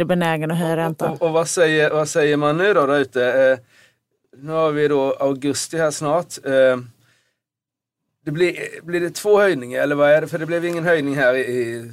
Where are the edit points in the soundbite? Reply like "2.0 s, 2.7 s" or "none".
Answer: none